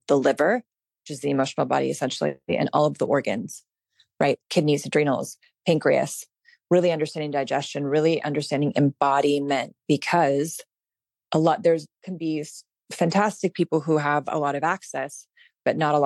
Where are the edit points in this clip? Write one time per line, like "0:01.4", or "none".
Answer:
none